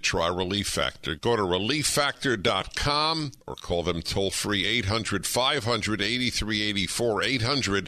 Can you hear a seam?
yes; 1 cut; at 3.4 s

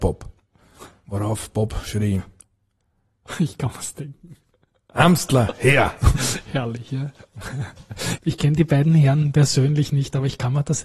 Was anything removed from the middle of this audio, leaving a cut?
yes; 1 cut; at 8.2 s

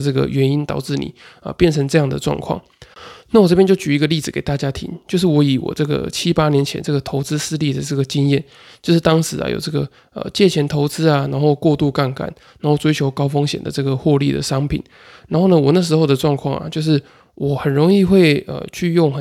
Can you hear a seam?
no; 0 cuts

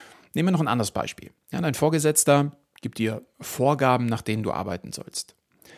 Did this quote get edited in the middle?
no; 0 cuts

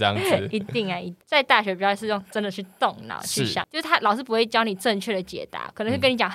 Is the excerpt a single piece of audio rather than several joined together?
no; 2 cuts; at 1.2 s, 3.6 s

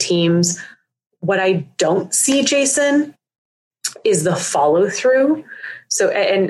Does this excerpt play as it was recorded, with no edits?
yes; 0 cuts

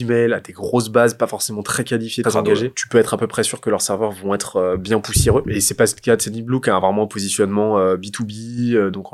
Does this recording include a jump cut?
yes; 1 cut; at 2.2 s

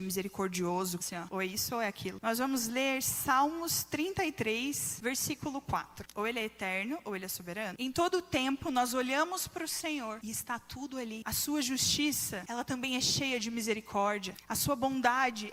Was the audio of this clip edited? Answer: yes; 3 cuts; at 1.0 s, 2.2 s, 6.1 s

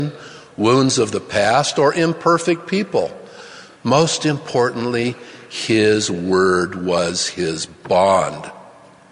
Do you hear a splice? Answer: no; 0 cuts

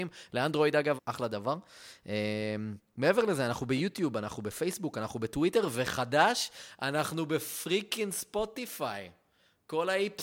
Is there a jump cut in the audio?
yes; 1 cut; at 1.0 s

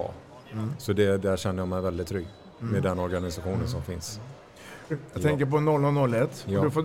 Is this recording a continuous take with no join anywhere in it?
no; 1 cut; at 4.9 s

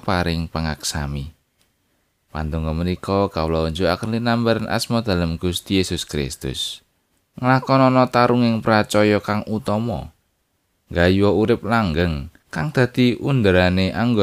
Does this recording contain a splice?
yes; 2 cuts; at 7.3 s, 12.4 s

